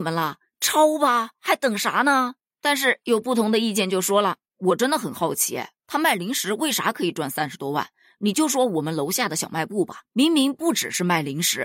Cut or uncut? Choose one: uncut